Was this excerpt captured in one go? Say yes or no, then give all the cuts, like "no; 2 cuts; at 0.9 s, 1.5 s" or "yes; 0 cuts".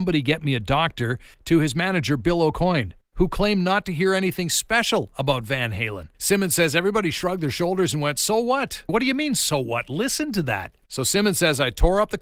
no; 2 cuts; at 6.1 s, 8.9 s